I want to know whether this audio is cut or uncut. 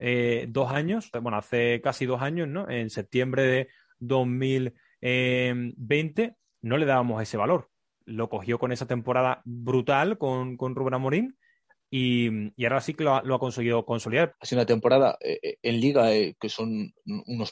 cut